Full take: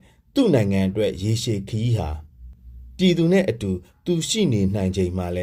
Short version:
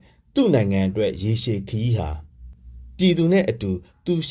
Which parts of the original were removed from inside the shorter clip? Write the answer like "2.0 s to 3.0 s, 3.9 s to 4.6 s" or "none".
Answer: none